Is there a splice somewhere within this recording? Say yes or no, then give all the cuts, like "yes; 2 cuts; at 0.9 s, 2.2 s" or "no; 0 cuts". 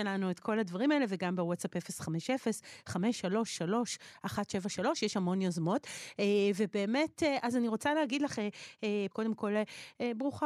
yes; 1 cut; at 9.1 s